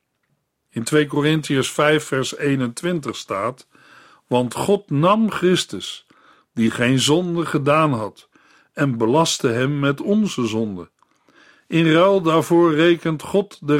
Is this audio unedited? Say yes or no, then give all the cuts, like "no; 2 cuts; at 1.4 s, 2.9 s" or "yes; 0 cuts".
yes; 0 cuts